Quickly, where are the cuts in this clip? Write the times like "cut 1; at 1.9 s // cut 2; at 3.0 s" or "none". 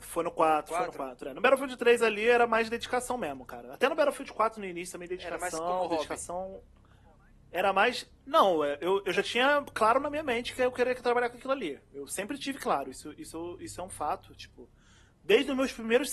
none

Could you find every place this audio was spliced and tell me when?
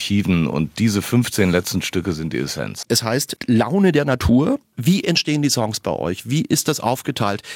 cut 1; at 2.9 s

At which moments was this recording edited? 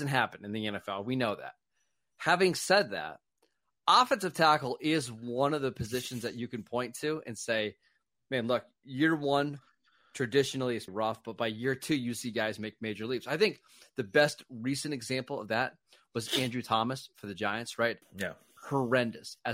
cut 1; at 10.9 s // cut 2; at 18.0 s

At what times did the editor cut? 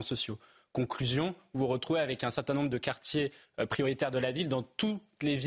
none

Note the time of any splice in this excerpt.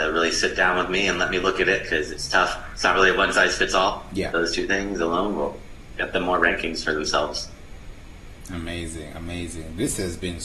cut 1; at 4.3 s

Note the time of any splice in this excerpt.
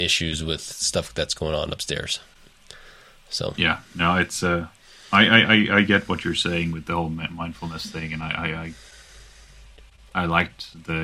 none

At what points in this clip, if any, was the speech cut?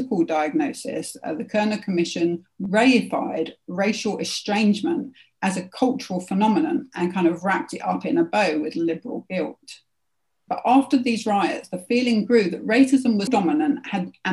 cut 1; at 10.5 s // cut 2; at 13.3 s

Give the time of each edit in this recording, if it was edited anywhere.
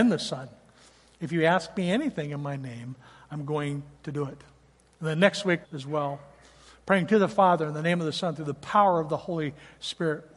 cut 1; at 5.6 s

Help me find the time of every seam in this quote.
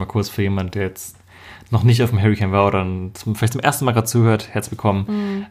none

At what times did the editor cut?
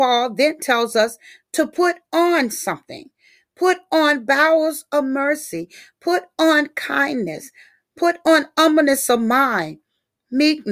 none

